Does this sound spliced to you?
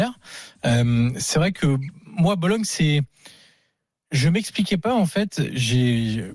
no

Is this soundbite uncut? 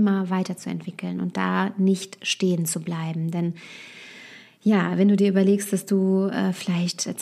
yes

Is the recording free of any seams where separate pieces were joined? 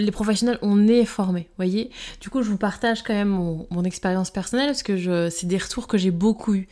yes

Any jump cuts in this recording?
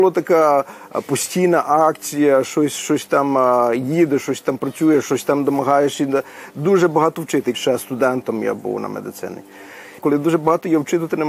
yes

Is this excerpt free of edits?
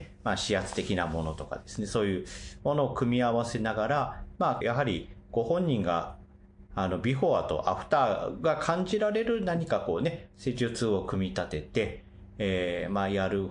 no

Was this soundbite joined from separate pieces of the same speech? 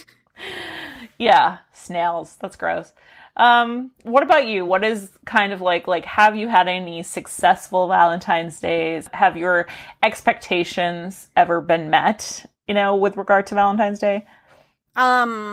no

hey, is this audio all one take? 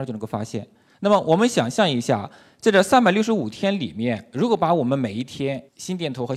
no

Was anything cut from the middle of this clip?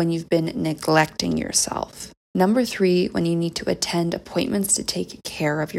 no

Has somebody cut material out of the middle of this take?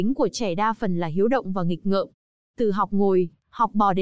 no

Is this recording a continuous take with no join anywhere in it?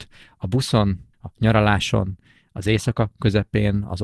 no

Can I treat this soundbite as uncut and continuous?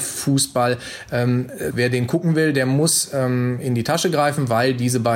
no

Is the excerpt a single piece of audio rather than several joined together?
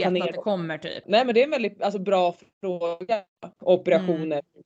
no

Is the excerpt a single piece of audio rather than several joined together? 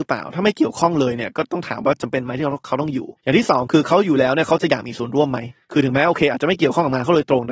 no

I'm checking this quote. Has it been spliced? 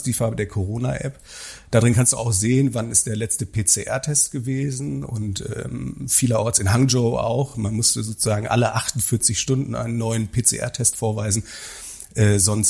no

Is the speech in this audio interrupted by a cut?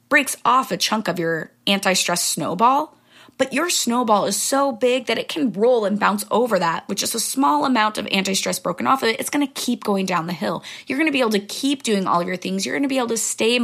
no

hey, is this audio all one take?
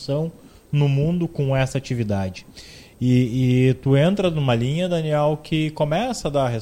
yes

